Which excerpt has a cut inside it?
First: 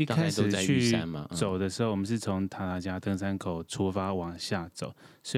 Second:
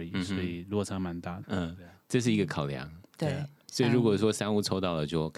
second; 1 cut; at 1.4 s

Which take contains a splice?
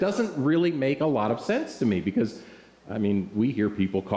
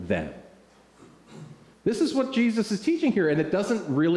second; 1 cut; at 1.7 s

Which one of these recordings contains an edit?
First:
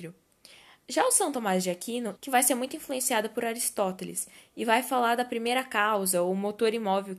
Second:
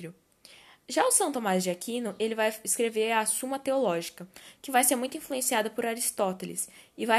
first; 1 cut; at 2.2 s

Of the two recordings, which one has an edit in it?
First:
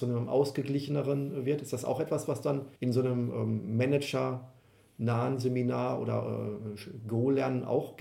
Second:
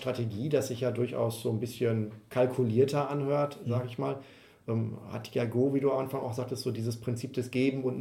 first; 1 cut; at 2.8 s

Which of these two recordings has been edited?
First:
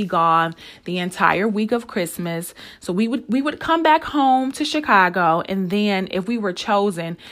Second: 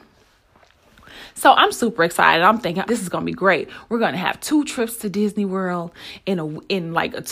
second; 1 cut; at 2.9 s

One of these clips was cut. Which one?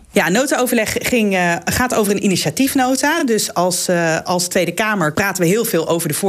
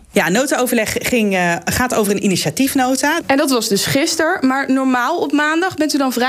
second; 1 cut; at 3.2 s

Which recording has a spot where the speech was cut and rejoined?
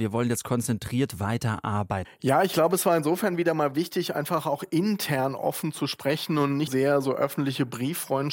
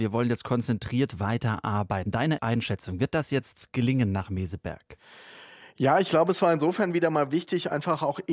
first; 2 cuts; at 2.0 s, 6.7 s

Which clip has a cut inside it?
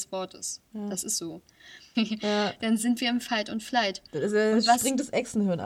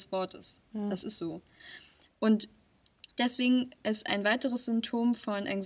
first; 1 cut; at 1.9 s

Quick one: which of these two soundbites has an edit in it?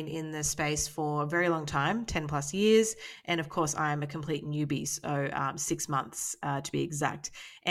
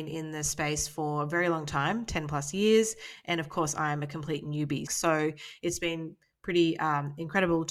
second; 1 cut; at 4.9 s

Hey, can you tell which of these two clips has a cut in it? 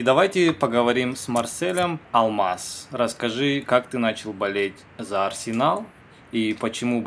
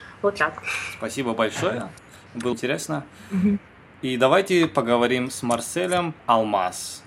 second; 1 cut; at 2.5 s

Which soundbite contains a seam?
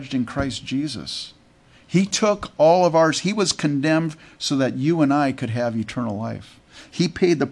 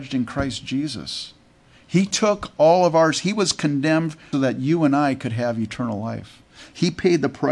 second; 1 cut; at 4.3 s

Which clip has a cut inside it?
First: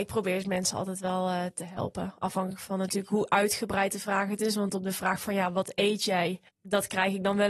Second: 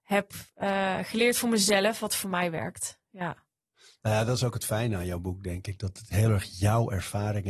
first; 1 cut; at 6.5 s

